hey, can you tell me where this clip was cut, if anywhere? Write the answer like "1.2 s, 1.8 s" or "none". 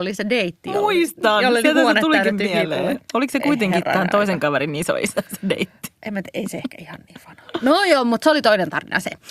none